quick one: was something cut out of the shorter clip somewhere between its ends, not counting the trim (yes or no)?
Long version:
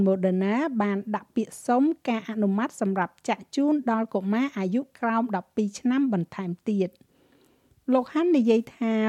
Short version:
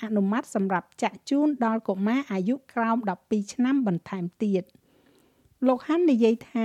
no